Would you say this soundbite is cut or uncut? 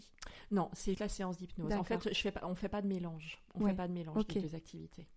cut